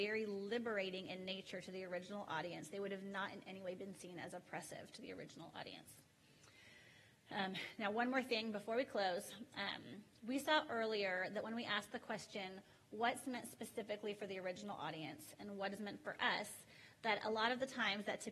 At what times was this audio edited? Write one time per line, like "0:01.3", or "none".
none